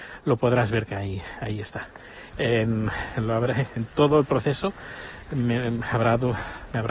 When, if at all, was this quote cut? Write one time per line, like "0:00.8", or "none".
0:02.3